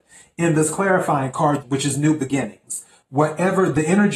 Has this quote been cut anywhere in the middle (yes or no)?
yes